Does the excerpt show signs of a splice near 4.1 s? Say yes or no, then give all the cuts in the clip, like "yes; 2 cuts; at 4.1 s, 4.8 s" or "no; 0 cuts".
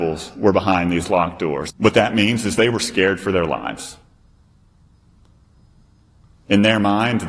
no; 1 cut; at 1.7 s